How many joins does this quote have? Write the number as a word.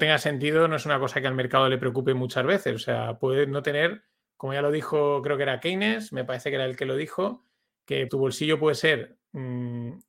one